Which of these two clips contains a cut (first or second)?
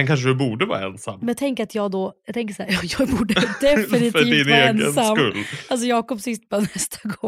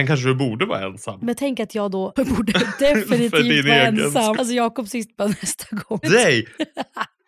second